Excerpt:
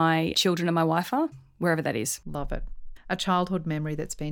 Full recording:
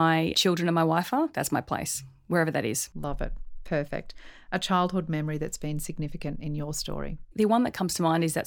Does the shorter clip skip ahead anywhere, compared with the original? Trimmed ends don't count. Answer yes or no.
yes